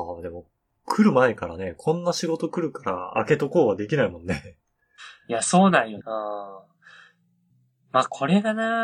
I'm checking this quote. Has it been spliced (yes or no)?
yes